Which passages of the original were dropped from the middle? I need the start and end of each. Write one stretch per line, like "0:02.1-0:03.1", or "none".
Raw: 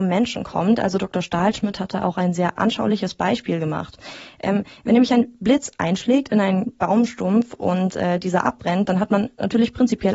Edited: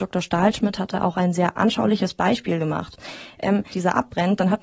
0:04.7-0:08.2